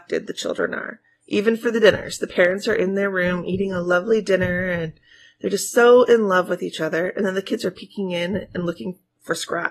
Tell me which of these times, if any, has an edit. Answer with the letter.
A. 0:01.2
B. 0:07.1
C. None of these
C